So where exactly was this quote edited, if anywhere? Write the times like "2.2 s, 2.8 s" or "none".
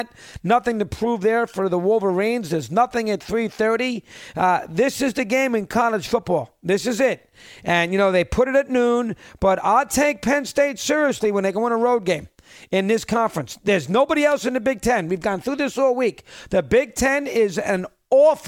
none